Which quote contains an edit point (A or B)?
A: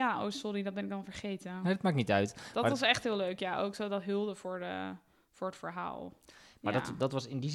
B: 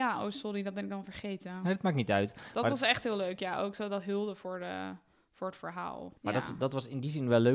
B